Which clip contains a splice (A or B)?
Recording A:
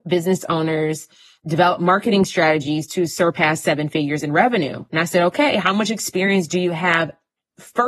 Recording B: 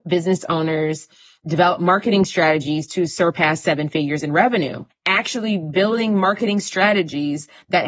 B